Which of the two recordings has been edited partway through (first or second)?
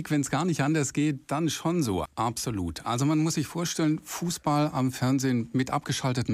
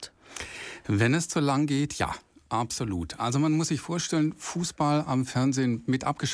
first